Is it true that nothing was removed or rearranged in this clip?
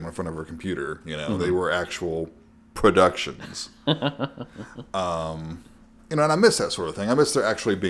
yes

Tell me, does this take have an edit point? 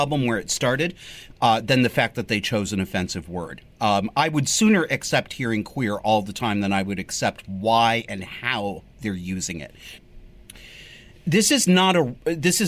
yes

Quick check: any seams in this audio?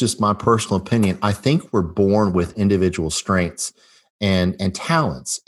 no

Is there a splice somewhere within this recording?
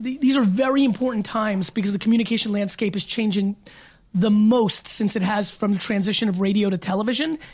no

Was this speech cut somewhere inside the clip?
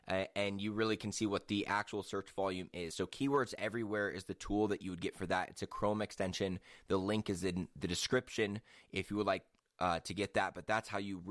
no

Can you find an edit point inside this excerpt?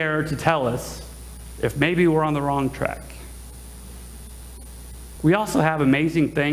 yes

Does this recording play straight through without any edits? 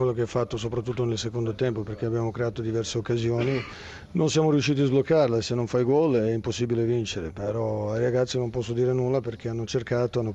yes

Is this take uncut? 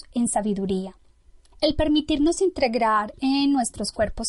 no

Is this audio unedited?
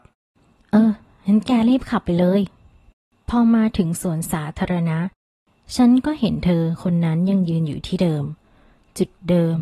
yes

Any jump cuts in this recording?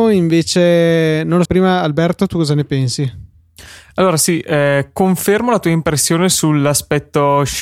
yes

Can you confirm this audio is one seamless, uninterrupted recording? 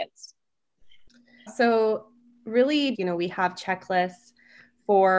no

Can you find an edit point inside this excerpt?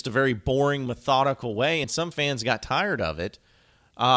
no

